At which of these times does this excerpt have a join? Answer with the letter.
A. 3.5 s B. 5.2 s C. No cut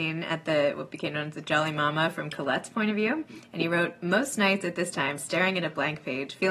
B